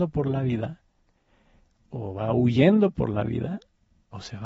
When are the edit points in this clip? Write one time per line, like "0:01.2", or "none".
none